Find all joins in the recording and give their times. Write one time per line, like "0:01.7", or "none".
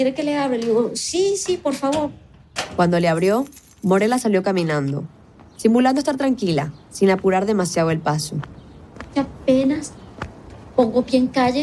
none